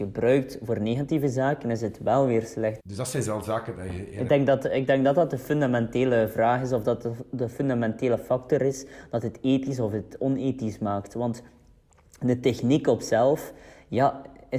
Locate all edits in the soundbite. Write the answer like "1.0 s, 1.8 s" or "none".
2.8 s